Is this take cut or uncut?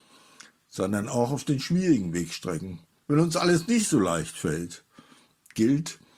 cut